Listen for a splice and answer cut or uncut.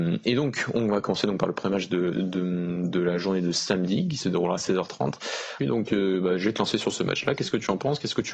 cut